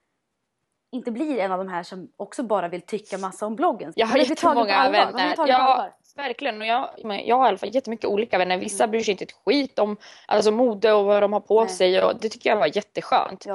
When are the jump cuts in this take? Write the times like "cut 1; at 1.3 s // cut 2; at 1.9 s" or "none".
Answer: cut 1; at 3.9 s // cut 2; at 7.0 s